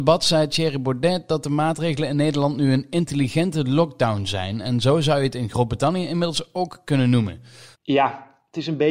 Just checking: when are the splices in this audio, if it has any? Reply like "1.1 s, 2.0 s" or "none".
7.8 s